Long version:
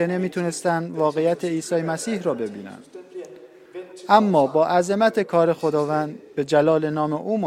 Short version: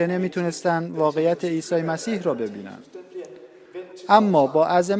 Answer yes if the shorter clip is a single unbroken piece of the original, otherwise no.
yes